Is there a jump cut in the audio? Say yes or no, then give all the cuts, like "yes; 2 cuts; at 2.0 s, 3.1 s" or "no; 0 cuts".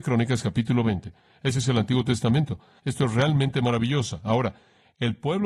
yes; 1 cut; at 2.8 s